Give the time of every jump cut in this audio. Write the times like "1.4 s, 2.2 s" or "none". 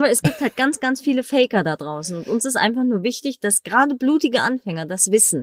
none